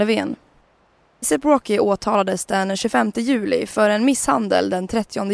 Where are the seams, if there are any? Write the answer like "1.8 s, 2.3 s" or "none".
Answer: 1.2 s